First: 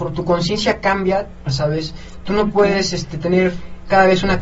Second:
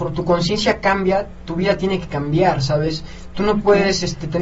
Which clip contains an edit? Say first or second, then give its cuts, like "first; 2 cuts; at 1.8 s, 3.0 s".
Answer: first; 1 cut; at 1.5 s